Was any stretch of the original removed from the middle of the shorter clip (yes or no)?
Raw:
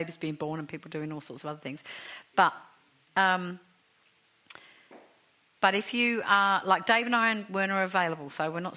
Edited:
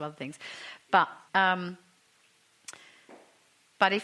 yes